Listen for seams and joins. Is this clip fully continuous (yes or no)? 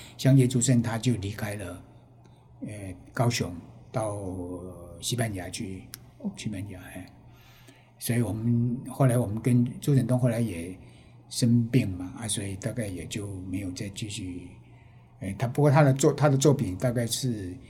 yes